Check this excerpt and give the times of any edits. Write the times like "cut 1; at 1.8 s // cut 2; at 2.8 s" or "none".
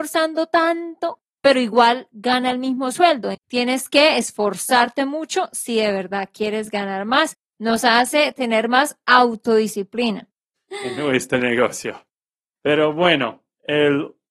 cut 1; at 3.3 s // cut 2; at 7.4 s // cut 3; at 10.6 s